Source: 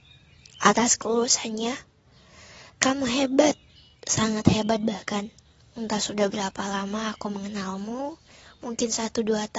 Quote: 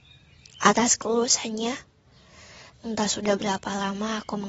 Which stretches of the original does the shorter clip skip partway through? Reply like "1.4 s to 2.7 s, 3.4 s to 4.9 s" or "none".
2.7 s to 5.7 s